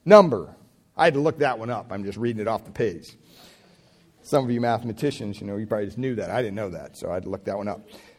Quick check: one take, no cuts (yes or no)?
yes